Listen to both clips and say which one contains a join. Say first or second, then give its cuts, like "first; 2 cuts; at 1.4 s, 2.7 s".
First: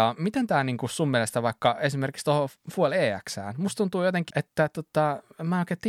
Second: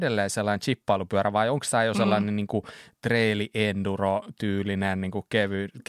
first; 1 cut; at 4.3 s